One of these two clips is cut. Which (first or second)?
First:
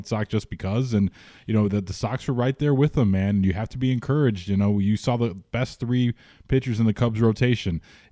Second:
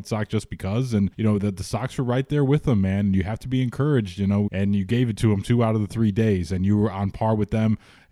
second